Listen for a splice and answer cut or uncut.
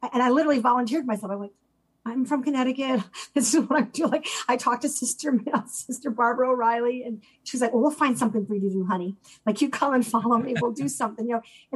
uncut